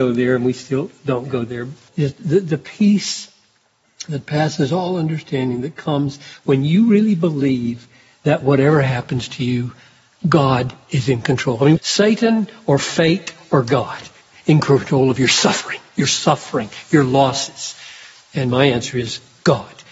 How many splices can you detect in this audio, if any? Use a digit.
2